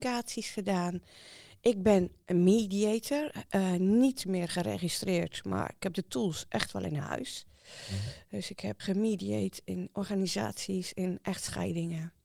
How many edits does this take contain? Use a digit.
1